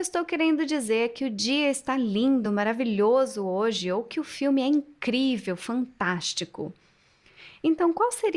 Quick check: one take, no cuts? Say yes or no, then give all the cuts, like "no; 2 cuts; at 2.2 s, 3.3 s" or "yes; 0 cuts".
yes; 0 cuts